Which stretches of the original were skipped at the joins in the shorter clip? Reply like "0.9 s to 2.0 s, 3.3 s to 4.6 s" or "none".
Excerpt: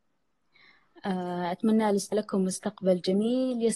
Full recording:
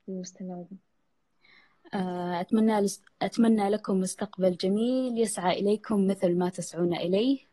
3.0 s to 3.7 s